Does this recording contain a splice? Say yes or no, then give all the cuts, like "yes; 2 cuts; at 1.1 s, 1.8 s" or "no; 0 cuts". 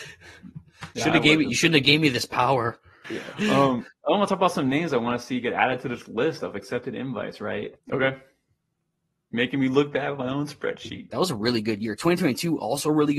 yes; 3 cuts; at 3.0 s, 7.8 s, 11.1 s